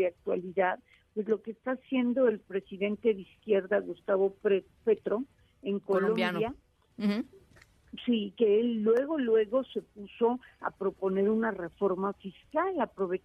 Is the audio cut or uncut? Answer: uncut